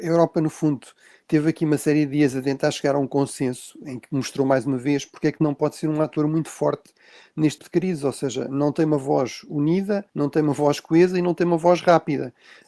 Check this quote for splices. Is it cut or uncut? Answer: cut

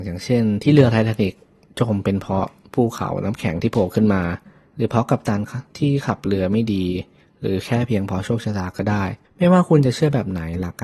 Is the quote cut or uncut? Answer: cut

